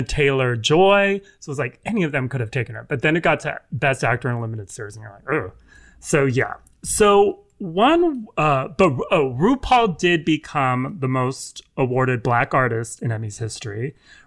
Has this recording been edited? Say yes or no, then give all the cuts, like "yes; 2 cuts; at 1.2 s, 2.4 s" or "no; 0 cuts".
no; 0 cuts